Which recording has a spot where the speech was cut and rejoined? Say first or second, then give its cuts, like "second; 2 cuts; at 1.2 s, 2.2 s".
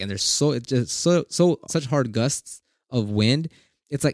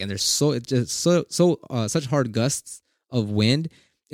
first; 1 cut; at 1.7 s